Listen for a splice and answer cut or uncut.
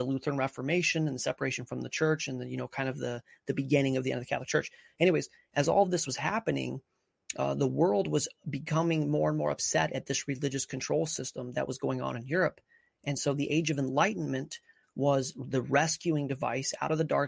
uncut